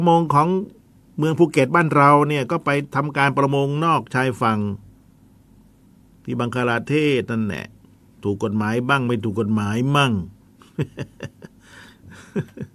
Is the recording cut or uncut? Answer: uncut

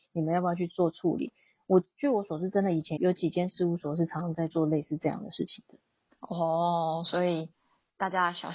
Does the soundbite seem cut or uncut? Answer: cut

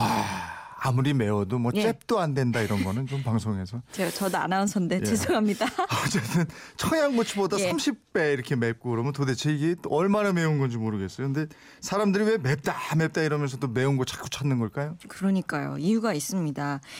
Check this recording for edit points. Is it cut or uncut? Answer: uncut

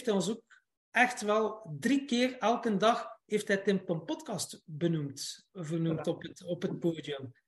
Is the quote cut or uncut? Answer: uncut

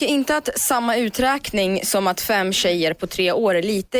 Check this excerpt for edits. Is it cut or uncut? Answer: uncut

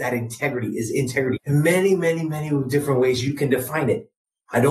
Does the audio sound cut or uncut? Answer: cut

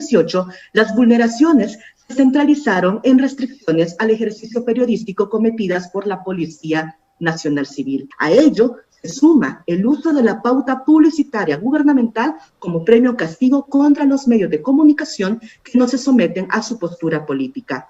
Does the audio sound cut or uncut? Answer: cut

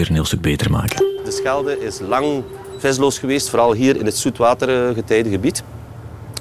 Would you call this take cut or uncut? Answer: uncut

